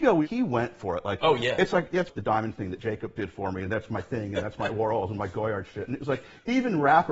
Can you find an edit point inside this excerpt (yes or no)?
yes